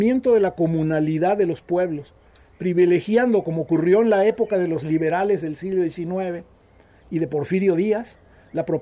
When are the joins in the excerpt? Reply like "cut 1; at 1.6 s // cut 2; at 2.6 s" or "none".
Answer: none